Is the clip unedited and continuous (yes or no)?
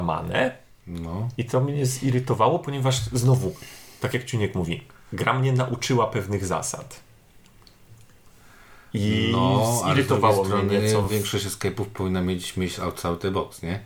yes